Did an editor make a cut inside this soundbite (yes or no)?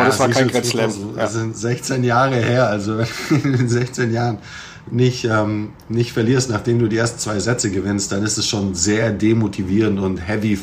no